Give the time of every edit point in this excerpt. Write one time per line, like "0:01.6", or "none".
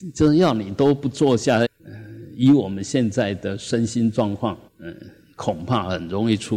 0:01.6
0:04.7